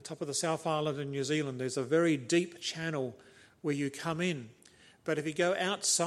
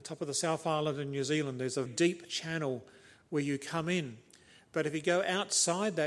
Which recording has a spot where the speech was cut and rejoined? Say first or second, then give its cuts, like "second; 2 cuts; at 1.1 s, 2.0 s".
second; 1 cut; at 1.9 s